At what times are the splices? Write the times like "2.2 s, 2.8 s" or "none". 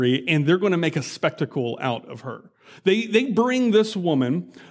none